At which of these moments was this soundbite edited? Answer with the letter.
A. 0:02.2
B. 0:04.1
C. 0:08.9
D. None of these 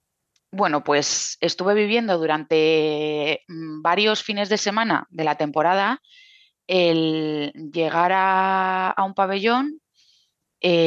D